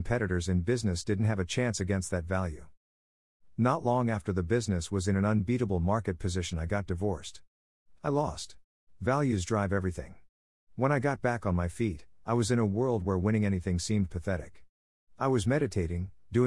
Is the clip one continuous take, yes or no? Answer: no